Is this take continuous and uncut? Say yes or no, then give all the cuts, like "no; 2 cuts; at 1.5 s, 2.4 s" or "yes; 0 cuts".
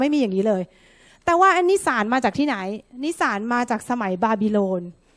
yes; 0 cuts